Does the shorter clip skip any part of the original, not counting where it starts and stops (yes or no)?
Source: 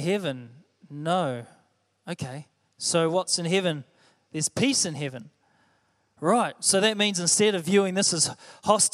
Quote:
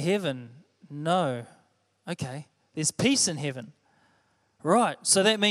yes